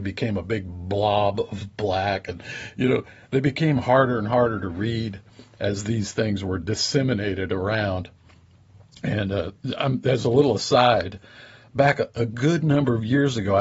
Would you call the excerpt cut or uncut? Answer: cut